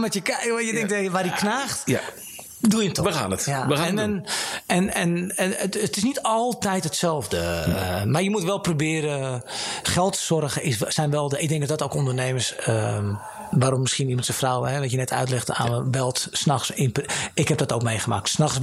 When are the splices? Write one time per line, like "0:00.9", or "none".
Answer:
none